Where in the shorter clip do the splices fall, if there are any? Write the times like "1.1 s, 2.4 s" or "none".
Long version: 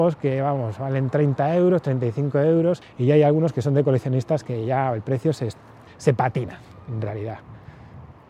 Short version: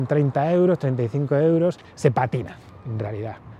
1.8 s